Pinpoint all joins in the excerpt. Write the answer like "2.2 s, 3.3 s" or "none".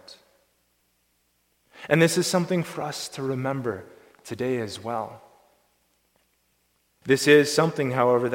7.0 s